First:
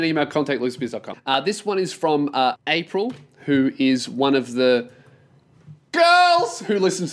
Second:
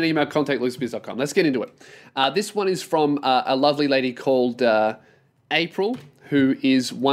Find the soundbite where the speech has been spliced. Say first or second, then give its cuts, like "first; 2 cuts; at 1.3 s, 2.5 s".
first; 2 cuts; at 1.1 s, 2.5 s